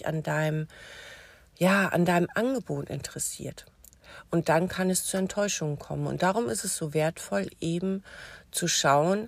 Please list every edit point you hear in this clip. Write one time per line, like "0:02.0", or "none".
none